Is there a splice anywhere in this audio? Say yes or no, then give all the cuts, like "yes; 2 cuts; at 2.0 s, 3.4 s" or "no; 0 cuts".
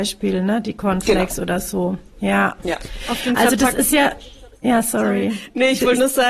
no; 0 cuts